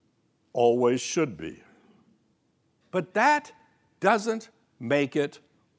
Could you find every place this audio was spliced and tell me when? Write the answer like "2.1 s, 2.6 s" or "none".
2.8 s